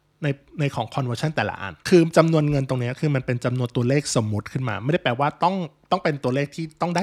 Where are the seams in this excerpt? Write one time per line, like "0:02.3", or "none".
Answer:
0:01.8